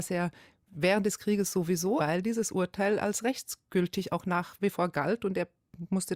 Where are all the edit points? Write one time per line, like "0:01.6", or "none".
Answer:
0:02.0